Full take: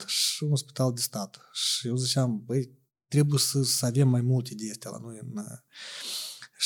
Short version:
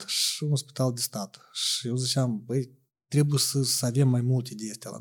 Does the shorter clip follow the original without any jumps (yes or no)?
yes